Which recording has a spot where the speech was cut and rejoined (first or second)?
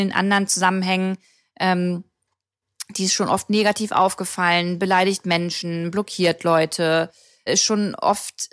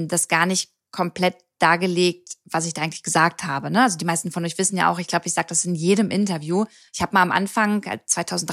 first